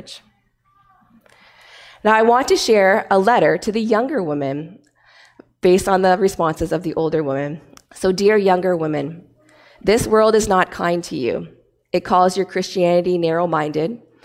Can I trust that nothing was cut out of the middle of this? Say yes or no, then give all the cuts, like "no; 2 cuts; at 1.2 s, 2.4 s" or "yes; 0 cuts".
no; 1 cut; at 7.8 s